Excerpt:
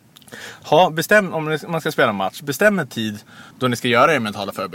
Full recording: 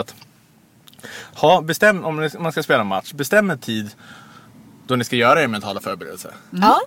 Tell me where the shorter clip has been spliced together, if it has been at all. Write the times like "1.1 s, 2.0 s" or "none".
3.5 s